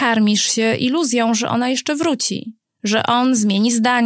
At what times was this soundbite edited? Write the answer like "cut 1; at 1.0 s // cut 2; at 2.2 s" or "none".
none